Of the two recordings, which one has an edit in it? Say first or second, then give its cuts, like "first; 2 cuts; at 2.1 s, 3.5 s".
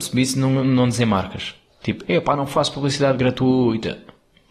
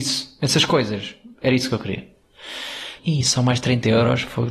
second; 1 cut; at 3.0 s